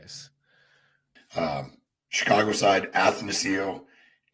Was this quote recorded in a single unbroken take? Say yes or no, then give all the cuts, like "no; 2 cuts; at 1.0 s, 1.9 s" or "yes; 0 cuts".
no; 1 cut; at 1.2 s